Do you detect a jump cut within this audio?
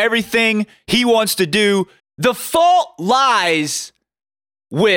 yes; 1 cut; at 2.0 s

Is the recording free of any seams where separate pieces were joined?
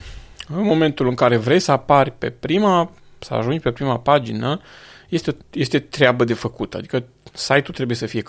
no; 1 cut; at 5.4 s

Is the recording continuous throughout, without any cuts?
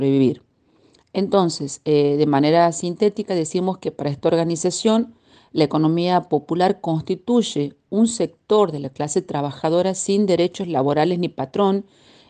yes; 0 cuts

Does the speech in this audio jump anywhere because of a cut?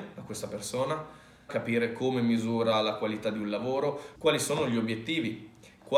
yes; 2 cuts; at 1.5 s, 4.2 s

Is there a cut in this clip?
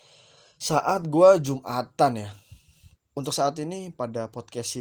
yes; 1 cut; at 3.0 s

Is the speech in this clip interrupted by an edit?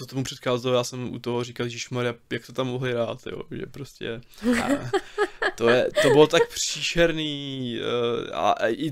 no; 0 cuts

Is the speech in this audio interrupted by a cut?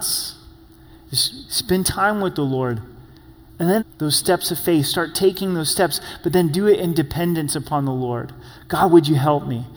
yes; 1 cut; at 3.8 s

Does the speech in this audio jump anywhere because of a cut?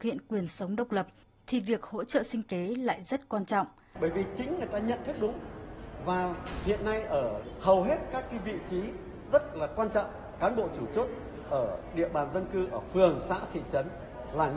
yes; 1 cut; at 4.0 s

